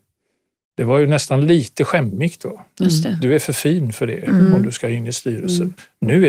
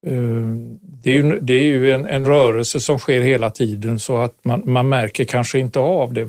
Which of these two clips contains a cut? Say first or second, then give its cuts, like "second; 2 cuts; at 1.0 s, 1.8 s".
second; 1 cut; at 2.2 s